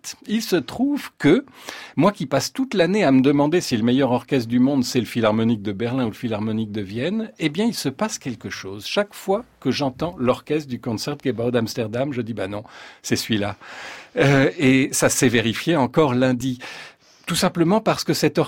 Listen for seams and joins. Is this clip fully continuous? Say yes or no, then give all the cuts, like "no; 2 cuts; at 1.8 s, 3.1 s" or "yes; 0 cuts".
yes; 0 cuts